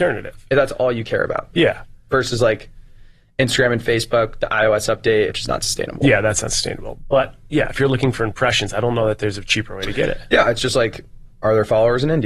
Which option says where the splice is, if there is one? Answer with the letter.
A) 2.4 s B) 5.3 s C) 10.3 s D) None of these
B